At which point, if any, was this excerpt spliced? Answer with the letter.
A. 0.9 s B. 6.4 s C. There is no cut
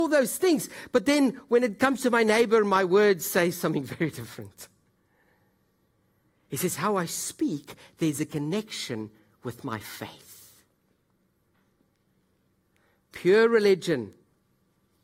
C